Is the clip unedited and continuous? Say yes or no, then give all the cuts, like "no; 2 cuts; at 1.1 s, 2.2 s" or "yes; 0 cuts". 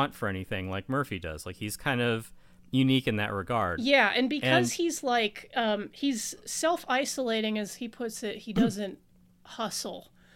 yes; 0 cuts